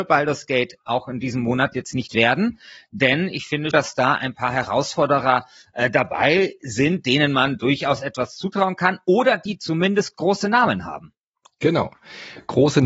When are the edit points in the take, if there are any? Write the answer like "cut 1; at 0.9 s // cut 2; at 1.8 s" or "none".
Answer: cut 1; at 3.7 s